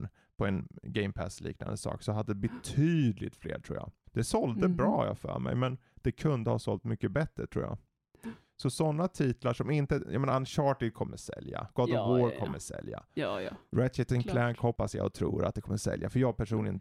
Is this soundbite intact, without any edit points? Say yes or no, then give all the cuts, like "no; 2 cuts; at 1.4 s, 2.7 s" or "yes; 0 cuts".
yes; 0 cuts